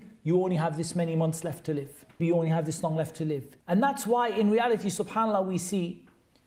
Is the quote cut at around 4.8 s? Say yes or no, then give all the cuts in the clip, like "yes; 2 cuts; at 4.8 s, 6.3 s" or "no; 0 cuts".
no; 2 cuts; at 2.2 s, 3.6 s